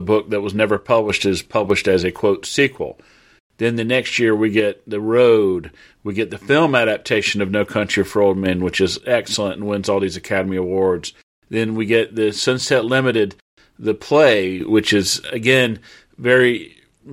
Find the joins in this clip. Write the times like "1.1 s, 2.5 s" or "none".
3.4 s, 15.2 s